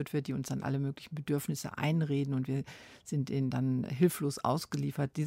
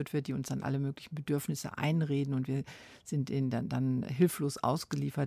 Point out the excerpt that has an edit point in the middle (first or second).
first